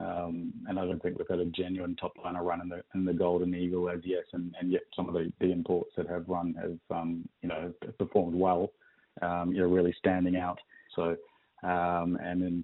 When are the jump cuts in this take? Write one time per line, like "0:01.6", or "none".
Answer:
0:09.1
0:10.9